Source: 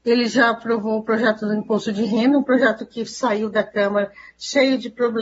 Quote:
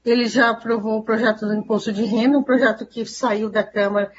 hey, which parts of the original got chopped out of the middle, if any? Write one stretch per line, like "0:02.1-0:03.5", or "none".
none